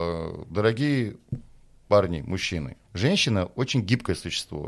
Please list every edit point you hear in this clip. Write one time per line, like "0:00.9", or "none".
0:02.8